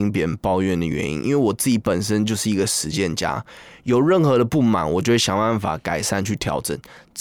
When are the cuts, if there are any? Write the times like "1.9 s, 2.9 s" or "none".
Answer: none